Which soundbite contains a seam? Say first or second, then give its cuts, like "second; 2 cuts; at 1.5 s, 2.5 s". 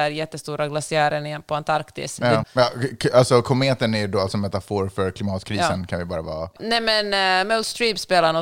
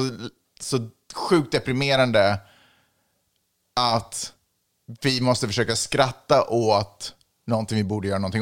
first; 2 cuts; at 2.4 s, 6.6 s